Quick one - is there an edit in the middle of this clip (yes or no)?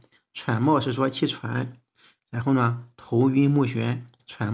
no